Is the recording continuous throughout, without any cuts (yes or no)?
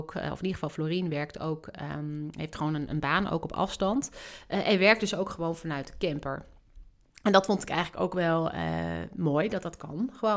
yes